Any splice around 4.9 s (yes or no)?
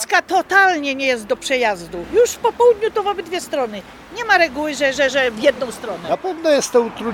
no